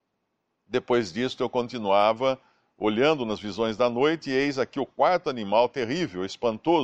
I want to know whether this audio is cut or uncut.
uncut